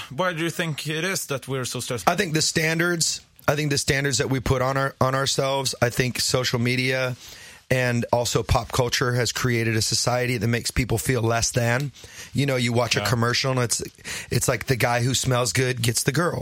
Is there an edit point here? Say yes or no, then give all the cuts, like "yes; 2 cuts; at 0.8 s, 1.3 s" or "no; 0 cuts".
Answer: yes; 2 cuts; at 2.0 s, 8.1 s